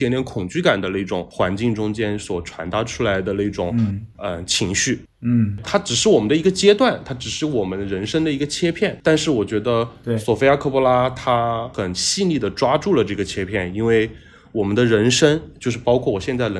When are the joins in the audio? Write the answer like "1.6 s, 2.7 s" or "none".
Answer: 5.6 s